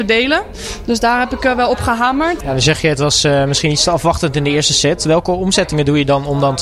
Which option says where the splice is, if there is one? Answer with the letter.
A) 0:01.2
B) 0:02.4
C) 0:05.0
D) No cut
B